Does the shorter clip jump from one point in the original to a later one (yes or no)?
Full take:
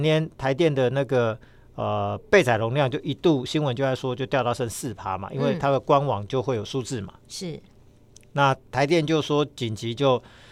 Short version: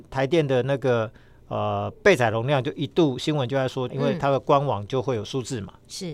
yes